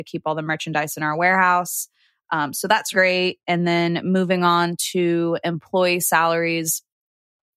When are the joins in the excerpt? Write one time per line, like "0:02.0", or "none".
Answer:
0:02.9